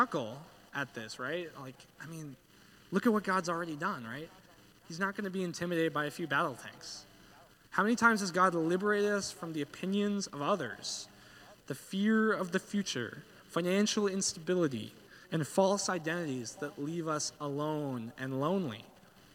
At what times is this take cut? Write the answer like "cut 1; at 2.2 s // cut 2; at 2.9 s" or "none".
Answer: cut 1; at 7.6 s // cut 2; at 15.2 s